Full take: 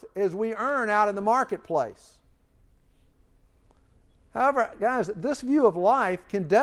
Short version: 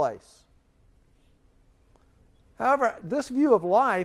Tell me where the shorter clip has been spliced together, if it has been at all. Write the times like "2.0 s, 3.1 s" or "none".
3.0 s